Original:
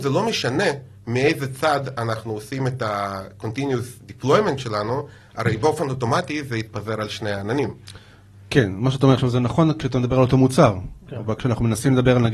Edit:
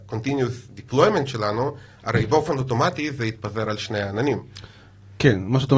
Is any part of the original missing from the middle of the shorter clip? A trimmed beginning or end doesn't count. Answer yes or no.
no